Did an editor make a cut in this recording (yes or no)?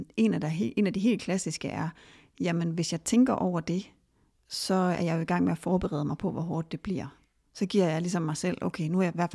no